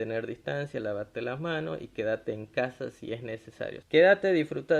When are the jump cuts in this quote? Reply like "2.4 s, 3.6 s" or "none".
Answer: 3.8 s